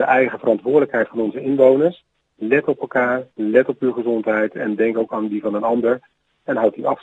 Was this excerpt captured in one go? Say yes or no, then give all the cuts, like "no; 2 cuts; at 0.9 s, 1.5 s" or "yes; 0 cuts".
yes; 0 cuts